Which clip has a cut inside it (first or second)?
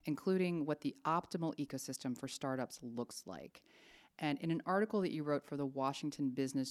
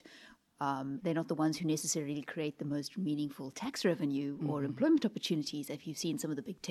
second